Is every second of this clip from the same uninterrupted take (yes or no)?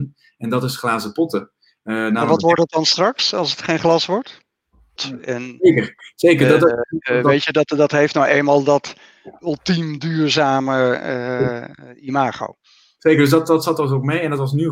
no